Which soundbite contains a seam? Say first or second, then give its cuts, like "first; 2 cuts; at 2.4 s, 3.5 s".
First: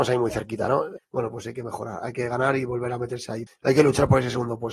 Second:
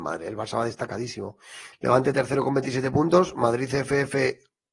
first; 2 cuts; at 1.0 s, 3.5 s